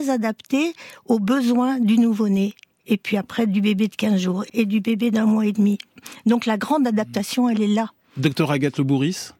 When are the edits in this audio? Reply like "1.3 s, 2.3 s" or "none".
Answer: 4.5 s